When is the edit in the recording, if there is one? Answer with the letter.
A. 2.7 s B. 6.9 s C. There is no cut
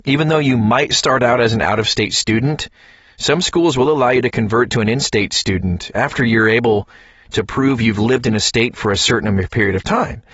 C